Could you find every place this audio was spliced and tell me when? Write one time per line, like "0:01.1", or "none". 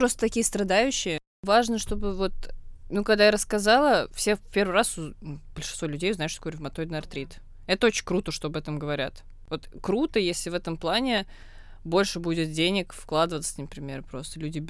none